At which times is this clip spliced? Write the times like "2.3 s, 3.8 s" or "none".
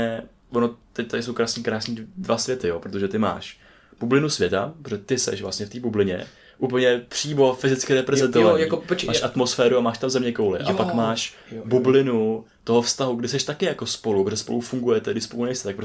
none